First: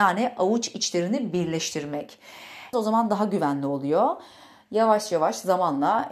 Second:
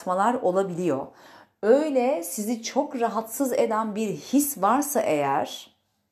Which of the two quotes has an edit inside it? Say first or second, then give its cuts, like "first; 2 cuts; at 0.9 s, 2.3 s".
first; 1 cut; at 2.7 s